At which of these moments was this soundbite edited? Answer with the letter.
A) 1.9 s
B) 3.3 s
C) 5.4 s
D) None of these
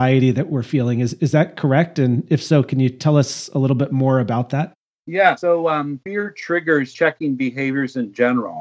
D